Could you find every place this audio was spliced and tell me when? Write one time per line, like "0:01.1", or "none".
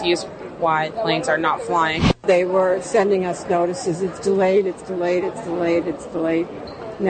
0:05.8